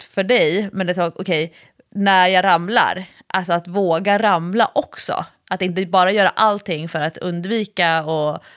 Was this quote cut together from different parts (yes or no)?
no